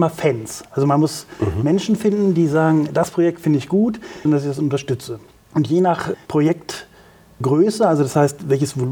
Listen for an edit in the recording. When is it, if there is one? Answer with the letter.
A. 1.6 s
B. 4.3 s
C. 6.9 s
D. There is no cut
B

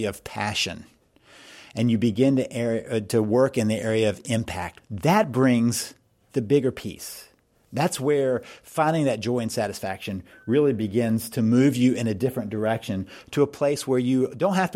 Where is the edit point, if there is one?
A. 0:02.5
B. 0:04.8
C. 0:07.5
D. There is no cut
B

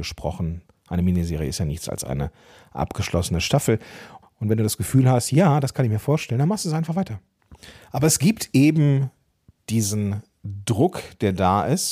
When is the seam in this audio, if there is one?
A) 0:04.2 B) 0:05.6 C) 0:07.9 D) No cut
A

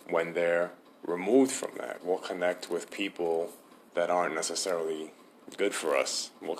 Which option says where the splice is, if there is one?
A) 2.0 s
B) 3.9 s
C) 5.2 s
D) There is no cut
A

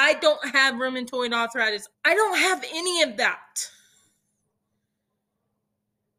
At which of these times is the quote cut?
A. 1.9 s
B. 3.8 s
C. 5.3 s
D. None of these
A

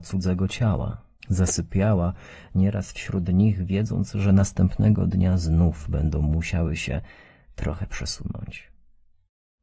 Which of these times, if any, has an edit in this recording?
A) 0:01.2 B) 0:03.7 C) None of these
A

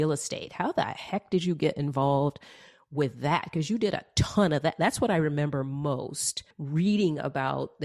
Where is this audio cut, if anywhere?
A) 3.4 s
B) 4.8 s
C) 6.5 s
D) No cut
C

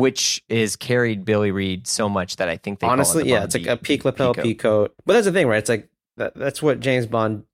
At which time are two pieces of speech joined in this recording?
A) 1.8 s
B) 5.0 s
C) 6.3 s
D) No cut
D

